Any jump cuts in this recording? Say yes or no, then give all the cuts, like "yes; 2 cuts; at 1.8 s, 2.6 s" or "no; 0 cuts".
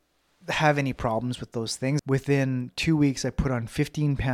yes; 1 cut; at 2.0 s